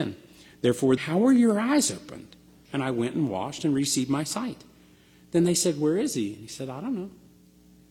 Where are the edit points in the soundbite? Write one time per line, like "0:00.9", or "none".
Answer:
0:01.0
0:02.7